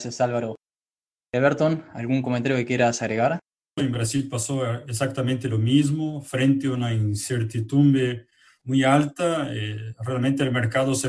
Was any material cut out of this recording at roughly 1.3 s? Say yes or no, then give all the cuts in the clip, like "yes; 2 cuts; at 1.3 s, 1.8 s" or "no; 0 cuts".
no; 2 cuts; at 3.8 s, 8.6 s